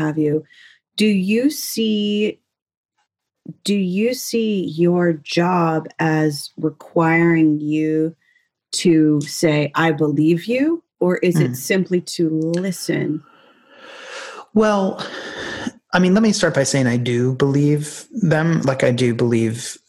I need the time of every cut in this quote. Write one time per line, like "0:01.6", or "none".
none